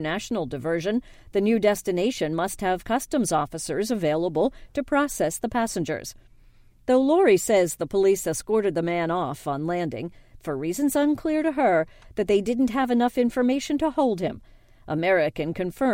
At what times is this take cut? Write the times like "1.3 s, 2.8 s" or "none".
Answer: 10.4 s